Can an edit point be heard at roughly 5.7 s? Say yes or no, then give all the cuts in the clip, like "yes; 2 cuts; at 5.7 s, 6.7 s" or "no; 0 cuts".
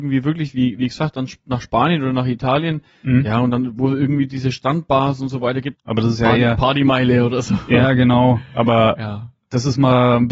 yes; 1 cut; at 5.7 s